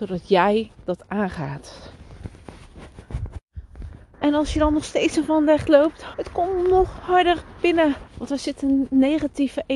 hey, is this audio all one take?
no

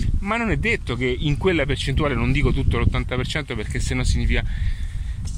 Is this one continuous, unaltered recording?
yes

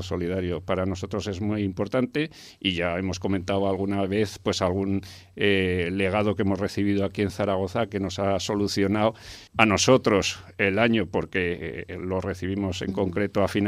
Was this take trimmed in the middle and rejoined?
yes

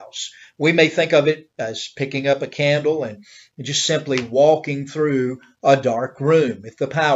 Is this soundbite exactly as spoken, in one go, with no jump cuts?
yes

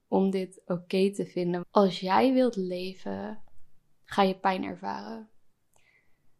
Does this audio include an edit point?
yes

